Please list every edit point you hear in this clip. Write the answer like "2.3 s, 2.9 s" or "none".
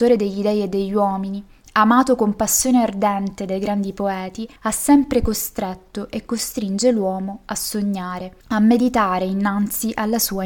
4.6 s, 8.4 s